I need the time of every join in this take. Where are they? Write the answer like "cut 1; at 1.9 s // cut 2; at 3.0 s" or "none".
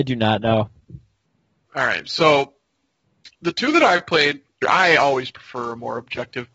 cut 1; at 1.7 s // cut 2; at 4.6 s